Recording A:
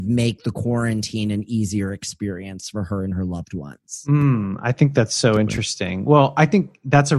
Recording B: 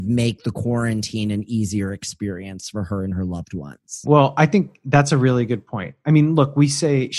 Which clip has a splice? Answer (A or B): B